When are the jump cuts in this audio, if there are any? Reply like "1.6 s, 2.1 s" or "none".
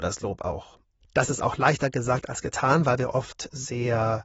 1.0 s